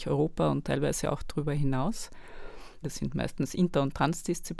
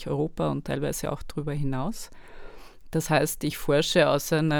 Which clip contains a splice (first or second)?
first